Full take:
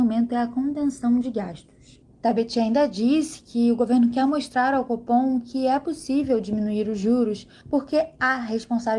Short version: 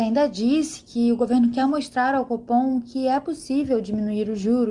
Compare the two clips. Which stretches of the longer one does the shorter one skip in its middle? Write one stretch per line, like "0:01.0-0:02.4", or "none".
none